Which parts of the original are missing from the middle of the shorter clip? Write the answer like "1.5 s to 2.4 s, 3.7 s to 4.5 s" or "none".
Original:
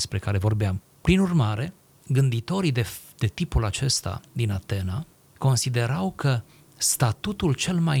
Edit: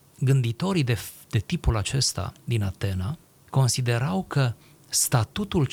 none